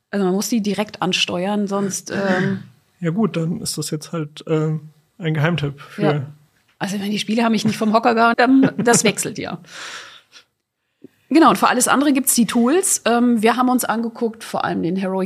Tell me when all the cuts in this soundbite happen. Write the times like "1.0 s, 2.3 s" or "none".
8.3 s